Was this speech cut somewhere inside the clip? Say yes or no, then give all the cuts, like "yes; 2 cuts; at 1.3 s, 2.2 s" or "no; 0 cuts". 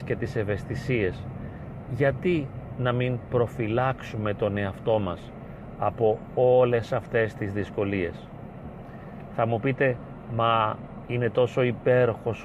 no; 0 cuts